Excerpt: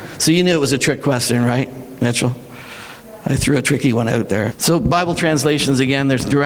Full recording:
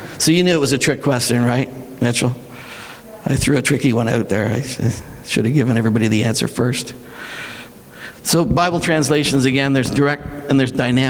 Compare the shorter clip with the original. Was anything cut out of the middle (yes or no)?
yes